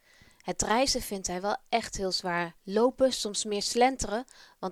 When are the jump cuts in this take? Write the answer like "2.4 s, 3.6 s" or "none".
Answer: 2.6 s

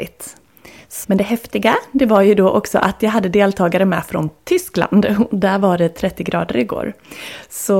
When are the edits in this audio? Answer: 1.0 s

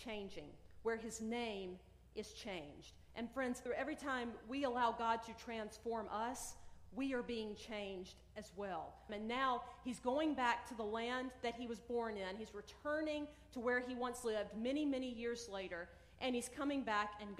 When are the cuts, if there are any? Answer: 3.7 s, 9.1 s

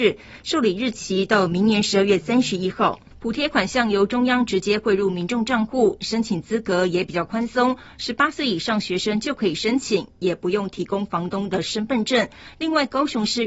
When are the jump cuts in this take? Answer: none

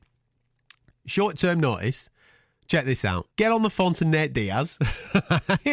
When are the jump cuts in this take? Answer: 3.3 s

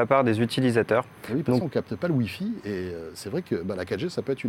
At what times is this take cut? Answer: 1.6 s

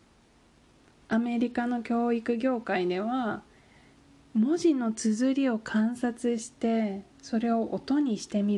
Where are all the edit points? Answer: 7.1 s

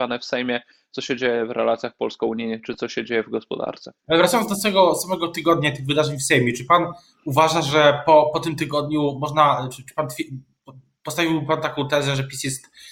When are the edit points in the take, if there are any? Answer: 4.0 s

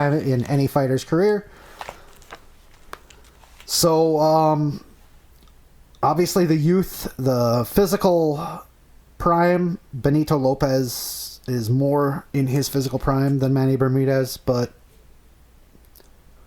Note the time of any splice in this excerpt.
none

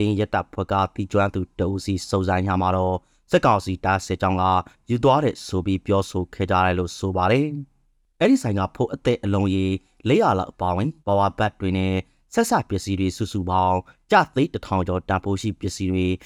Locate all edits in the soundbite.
11.0 s

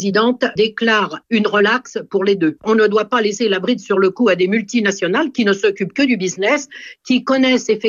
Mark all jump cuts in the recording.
none

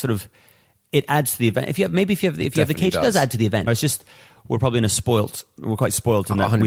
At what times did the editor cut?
3.7 s, 5.6 s

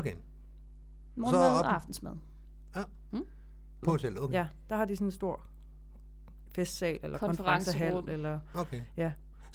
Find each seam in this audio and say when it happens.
3.8 s

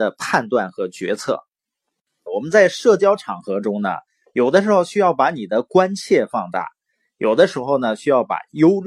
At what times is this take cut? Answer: 2.3 s

